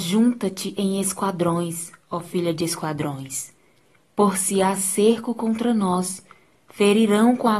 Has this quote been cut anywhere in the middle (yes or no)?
no